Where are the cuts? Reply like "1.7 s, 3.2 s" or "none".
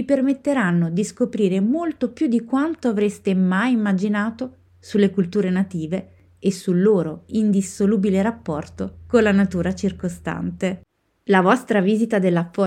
none